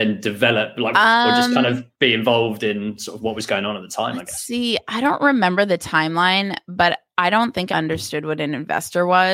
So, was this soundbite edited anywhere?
yes; 2 cuts; at 0.9 s, 7.7 s

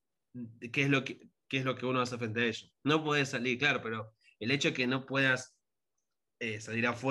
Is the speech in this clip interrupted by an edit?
no; 0 cuts

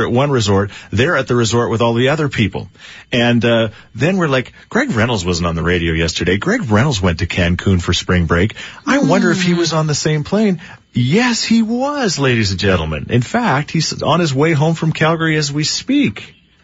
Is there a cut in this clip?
no; 0 cuts

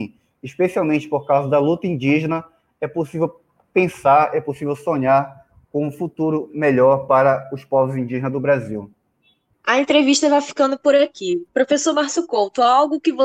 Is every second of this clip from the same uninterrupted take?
yes; 0 cuts

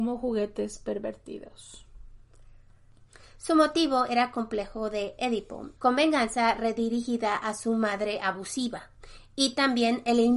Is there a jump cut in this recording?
yes; 1 cut; at 5.8 s

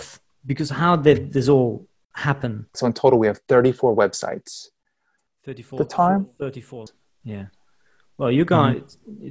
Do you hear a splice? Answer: yes; 1 cut; at 2.7 s

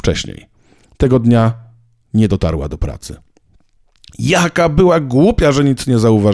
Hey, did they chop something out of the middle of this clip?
no; 0 cuts

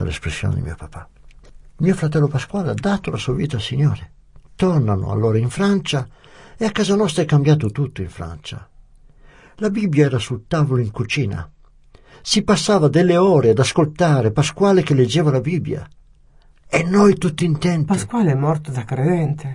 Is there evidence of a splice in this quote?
no; 0 cuts

